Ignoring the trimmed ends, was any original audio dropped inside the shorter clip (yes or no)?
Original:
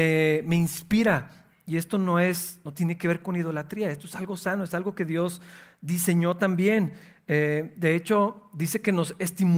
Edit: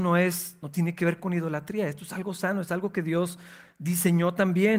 no